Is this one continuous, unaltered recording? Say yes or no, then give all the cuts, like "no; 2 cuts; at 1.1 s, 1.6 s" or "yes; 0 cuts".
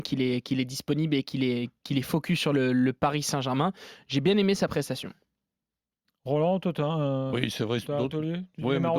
yes; 0 cuts